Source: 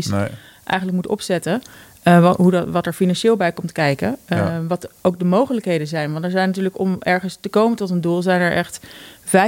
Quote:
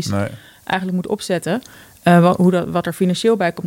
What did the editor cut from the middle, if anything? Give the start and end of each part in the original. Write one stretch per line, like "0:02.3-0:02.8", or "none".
none